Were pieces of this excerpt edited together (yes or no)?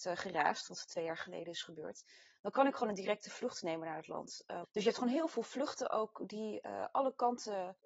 yes